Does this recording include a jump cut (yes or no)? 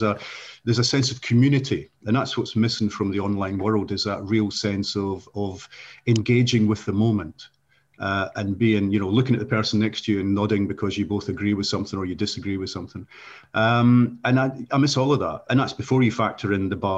yes